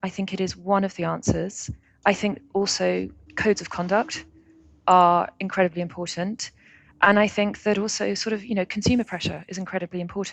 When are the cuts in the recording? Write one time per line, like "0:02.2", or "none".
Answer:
none